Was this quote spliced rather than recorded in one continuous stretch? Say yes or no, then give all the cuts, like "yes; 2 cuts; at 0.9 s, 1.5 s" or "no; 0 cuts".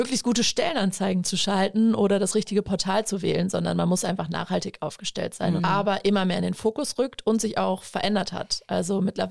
yes; 1 cut; at 5.6 s